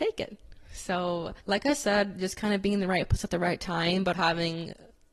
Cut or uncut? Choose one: cut